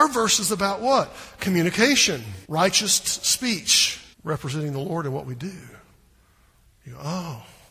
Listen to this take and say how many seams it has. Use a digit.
2